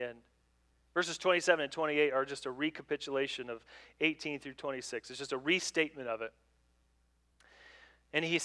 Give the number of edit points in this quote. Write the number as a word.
zero